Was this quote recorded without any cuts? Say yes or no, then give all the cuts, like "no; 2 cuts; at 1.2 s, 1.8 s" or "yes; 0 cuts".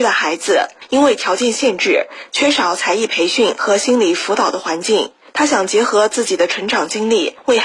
no; 1 cut; at 2.3 s